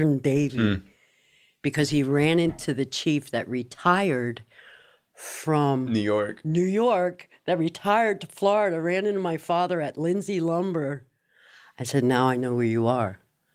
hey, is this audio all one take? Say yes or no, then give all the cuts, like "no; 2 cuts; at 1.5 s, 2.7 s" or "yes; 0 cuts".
yes; 0 cuts